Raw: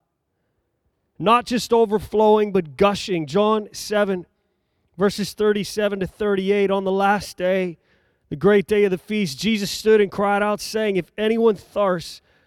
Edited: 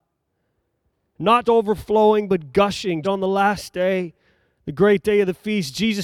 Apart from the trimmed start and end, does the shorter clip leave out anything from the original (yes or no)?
yes